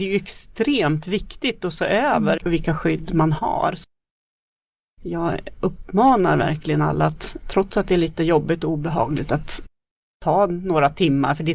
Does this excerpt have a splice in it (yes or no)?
no